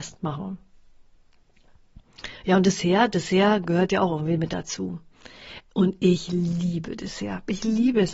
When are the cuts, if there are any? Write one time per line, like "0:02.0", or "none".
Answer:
none